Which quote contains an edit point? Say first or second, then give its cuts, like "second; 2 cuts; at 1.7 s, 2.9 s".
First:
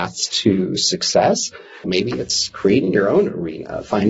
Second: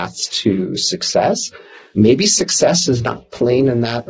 first; 1 cut; at 1.8 s